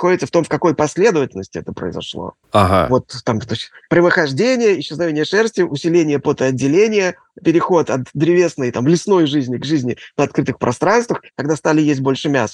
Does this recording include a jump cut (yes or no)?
yes